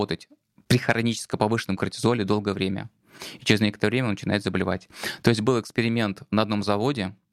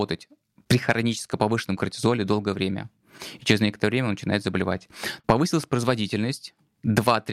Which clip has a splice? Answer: second; 1 cut; at 5.2 s

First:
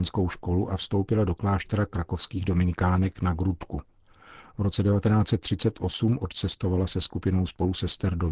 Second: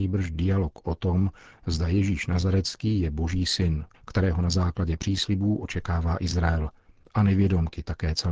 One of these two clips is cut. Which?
second; 1 cut; at 3.9 s

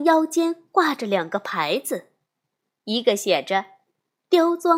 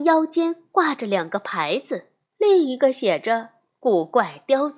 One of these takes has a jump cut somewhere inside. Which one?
second; 1 cut; at 2.3 s

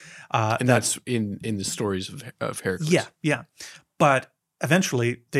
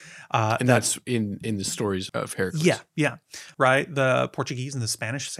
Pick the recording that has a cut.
second; 2 cuts; at 2.1 s, 3.5 s

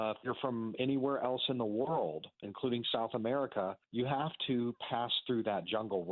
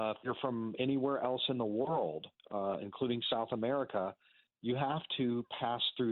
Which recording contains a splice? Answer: first; 2 cuts; at 2.4 s, 3.8 s

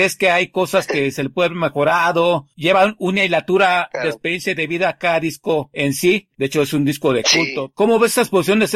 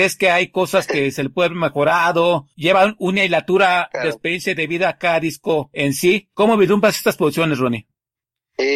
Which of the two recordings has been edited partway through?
first; 1 cut; at 6.3 s

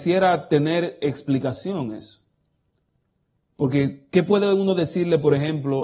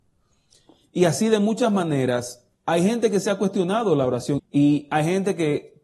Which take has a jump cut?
second; 2 cuts; at 2.5 s, 4.4 s

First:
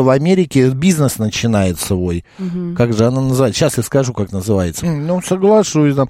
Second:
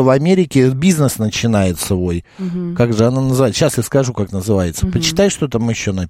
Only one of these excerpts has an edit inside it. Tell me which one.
first; 1 cut; at 4.8 s

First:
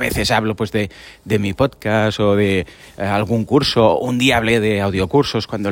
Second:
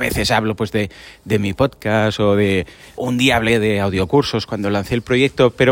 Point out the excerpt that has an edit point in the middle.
second; 1 cut; at 3.0 s

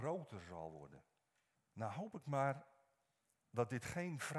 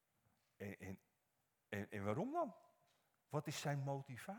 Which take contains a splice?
first; 1 cut; at 1.6 s

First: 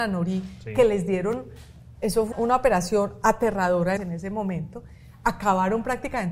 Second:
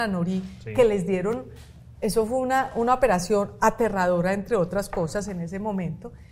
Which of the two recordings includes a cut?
first; 2 cuts; at 2.3 s, 4.0 s

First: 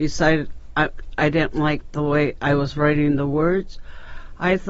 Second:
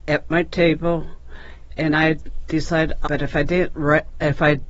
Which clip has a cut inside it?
second; 1 cut; at 3.0 s

